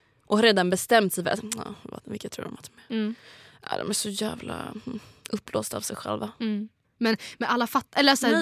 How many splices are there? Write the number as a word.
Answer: one